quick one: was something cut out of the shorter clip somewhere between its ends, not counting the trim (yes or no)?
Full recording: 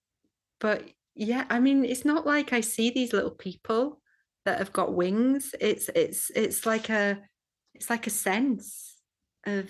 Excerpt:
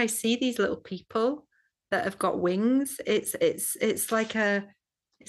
no